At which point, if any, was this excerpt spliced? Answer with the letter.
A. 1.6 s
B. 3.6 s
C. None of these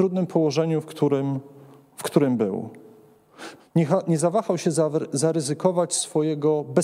B